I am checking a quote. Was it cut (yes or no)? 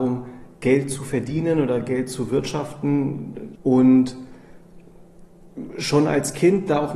yes